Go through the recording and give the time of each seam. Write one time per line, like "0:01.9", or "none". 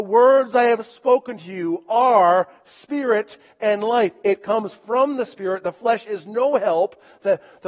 none